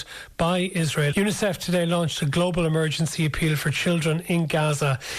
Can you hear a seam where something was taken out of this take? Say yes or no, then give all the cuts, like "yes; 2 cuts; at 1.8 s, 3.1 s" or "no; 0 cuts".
yes; 1 cut; at 1.1 s